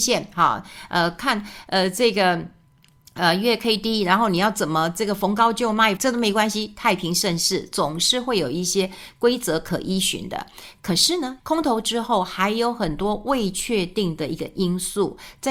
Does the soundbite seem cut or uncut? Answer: cut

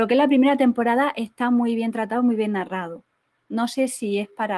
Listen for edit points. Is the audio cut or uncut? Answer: uncut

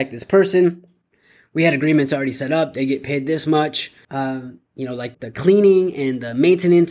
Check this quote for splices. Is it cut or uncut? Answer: cut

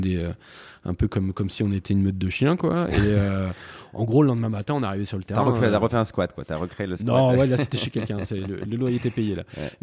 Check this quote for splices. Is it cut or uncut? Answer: uncut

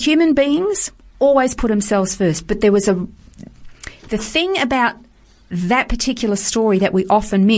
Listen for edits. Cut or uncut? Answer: uncut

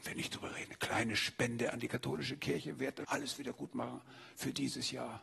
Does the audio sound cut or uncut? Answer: cut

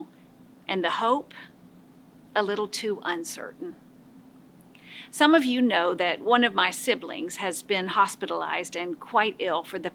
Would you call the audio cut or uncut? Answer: uncut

